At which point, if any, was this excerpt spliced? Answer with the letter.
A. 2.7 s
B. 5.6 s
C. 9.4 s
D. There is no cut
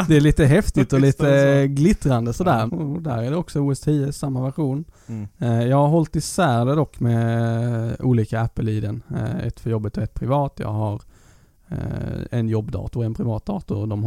A